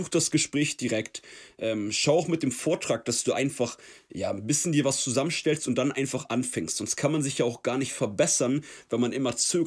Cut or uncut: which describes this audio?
uncut